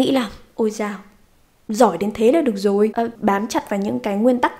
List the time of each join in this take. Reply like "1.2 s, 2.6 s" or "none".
3.2 s